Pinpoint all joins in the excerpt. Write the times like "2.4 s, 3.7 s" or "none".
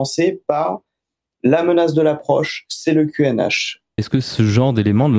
4.0 s